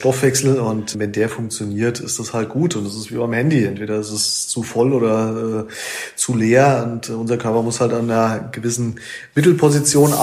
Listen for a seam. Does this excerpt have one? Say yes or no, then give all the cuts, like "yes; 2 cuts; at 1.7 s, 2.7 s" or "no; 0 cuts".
no; 0 cuts